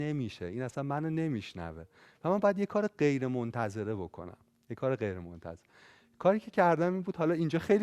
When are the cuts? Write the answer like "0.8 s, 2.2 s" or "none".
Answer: none